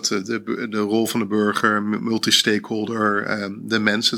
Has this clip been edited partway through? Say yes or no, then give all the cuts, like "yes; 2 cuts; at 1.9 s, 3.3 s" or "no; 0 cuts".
no; 0 cuts